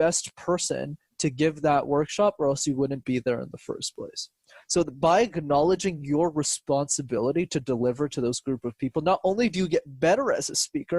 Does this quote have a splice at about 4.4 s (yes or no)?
no